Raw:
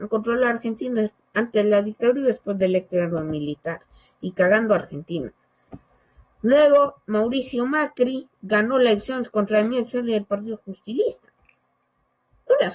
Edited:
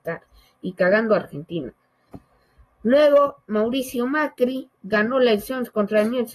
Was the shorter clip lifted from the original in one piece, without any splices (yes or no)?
yes